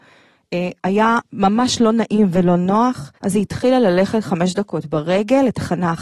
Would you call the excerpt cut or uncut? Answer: cut